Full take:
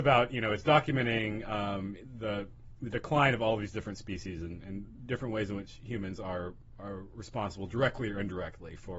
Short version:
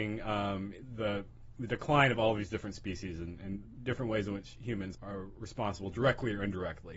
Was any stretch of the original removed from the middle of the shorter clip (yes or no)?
yes